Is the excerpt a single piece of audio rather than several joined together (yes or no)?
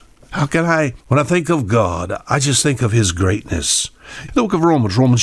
no